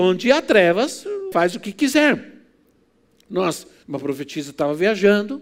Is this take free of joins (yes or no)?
no